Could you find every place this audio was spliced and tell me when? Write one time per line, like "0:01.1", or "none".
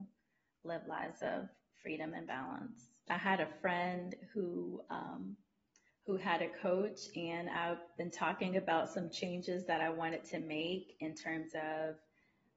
0:03.1